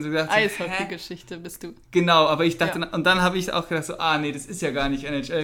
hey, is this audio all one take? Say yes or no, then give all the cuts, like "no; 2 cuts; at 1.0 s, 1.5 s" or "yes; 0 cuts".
yes; 0 cuts